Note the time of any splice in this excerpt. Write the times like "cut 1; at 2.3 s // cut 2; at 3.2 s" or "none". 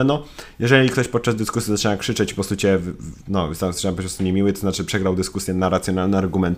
none